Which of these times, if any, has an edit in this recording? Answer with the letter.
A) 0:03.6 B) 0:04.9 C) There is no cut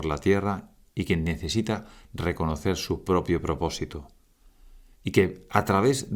B